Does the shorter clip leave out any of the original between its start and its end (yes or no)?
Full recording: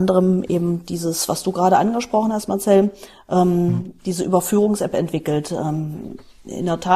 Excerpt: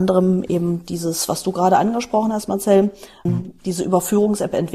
yes